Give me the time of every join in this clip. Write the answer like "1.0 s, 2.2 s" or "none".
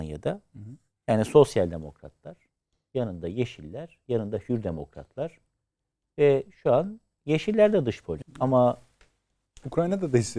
8.2 s

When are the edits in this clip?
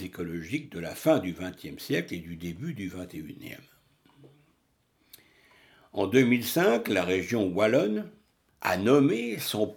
8.5 s

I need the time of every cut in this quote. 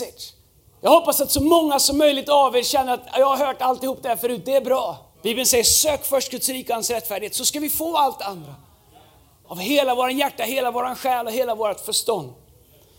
5.1 s, 9.4 s

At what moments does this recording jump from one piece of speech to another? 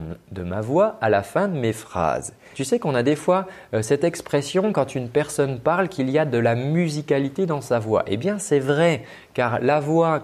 2.5 s

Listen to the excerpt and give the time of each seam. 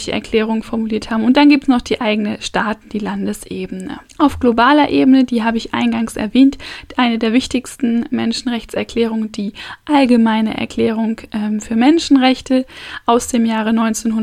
4.1 s

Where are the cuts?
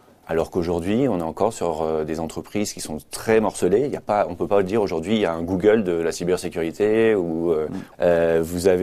7.9 s

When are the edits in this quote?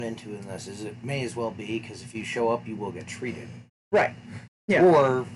4.5 s

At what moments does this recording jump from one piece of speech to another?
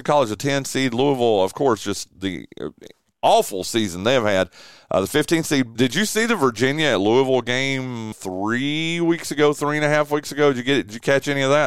5.8 s, 8.1 s

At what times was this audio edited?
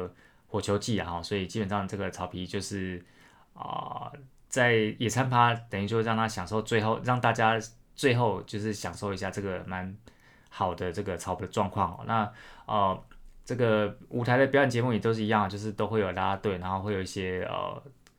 none

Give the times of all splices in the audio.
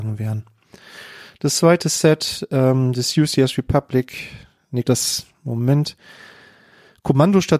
4.8 s

